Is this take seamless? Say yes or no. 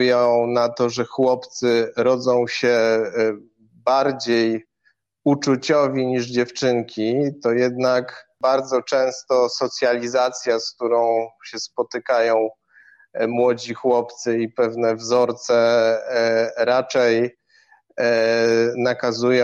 yes